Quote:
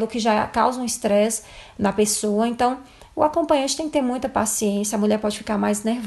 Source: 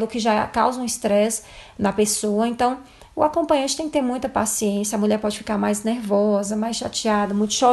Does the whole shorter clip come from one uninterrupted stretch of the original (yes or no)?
yes